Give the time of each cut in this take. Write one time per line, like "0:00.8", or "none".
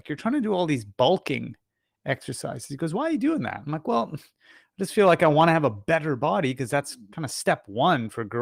none